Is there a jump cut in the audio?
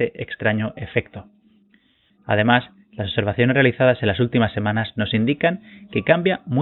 yes; 1 cut; at 2.1 s

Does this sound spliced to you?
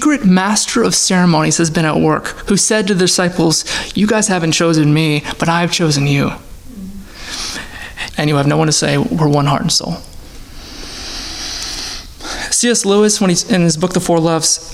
yes; 2 cuts; at 2.5 s, 8.1 s

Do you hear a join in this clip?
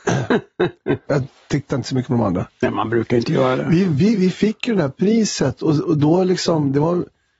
yes; 1 cut; at 1.1 s

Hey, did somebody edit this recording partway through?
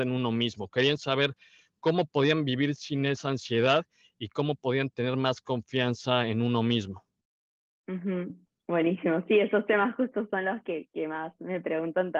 no; 0 cuts

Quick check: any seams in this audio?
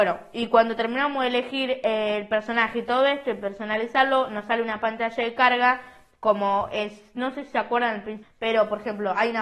yes; 1 cut; at 8.2 s

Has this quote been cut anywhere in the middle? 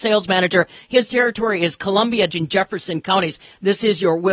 yes; 1 cut; at 2.3 s

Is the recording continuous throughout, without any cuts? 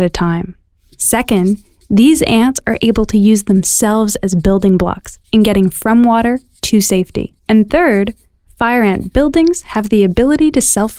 no; 1 cut; at 7.4 s

